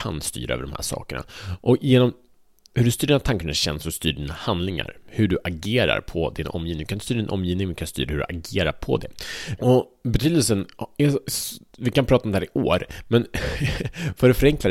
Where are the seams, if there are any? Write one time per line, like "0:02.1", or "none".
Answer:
0:09.6